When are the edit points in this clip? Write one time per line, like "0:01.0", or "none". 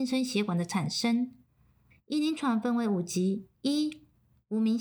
0:01.9
0:03.6

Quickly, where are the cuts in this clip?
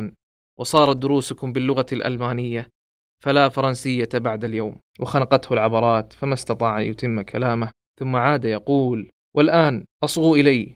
0:04.9

